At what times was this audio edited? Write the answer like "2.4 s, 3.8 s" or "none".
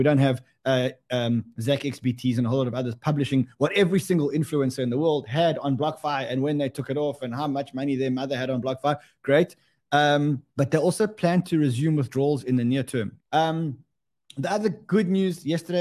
10.5 s, 13.2 s